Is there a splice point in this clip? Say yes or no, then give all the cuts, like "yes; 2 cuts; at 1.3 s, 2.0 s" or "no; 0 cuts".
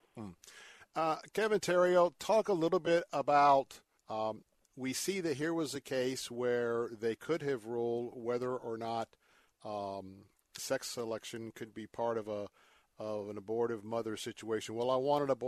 yes; 2 cuts; at 4.0 s, 10.6 s